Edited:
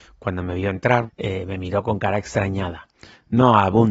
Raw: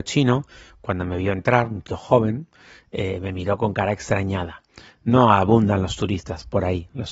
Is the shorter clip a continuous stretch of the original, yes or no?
no